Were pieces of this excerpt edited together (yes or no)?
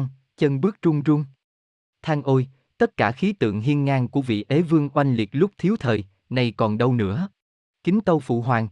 yes